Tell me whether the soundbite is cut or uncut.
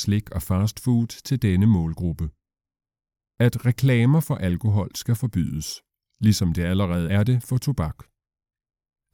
uncut